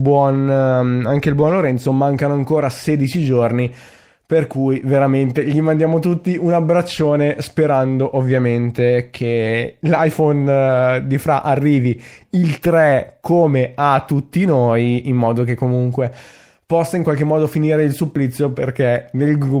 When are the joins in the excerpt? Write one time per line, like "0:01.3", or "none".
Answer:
none